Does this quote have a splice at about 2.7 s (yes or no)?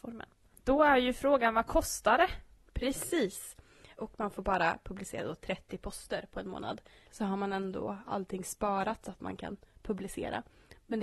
no